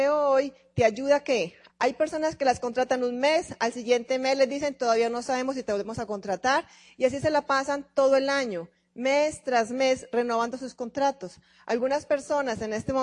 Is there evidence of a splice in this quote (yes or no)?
yes